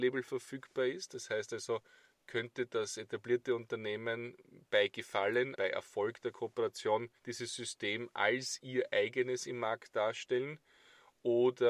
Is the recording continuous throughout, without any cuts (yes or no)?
no